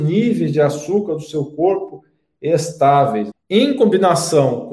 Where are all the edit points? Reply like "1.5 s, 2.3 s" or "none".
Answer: 3.3 s